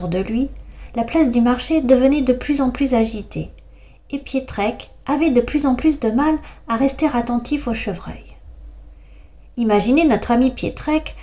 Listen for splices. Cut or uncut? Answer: uncut